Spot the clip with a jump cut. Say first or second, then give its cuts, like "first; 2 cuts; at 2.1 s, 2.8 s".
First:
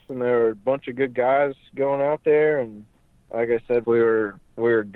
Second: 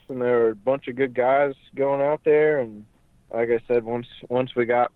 first; 1 cut; at 3.8 s